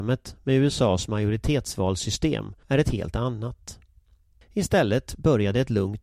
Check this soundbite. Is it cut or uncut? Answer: cut